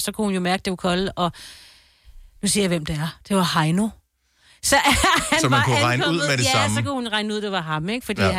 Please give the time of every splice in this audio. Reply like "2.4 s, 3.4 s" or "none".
none